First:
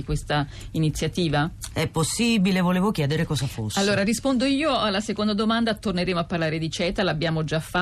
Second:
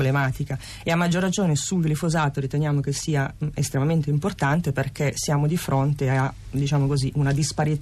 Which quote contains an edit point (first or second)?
first